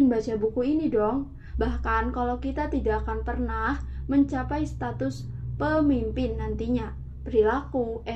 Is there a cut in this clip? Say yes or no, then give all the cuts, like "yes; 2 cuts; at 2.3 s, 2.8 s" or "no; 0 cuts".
yes; 1 cut; at 1.5 s